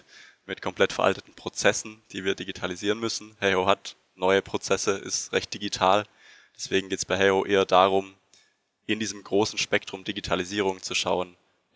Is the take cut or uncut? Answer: uncut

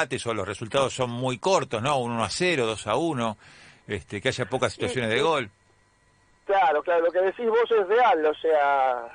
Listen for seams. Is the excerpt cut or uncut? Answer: uncut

